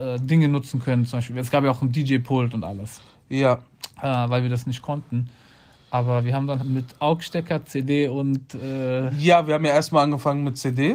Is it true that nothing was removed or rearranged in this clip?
no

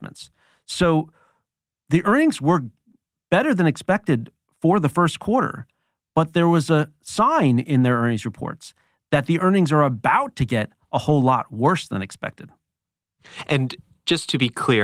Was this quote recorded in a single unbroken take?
yes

